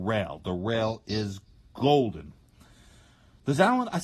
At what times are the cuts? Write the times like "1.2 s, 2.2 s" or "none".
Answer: none